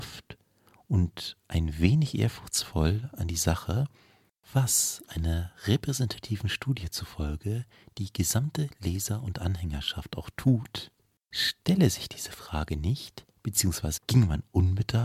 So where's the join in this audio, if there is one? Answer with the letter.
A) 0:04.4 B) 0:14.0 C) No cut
B